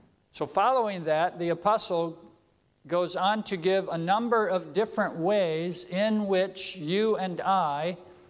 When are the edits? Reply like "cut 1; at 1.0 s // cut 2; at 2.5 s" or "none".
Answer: none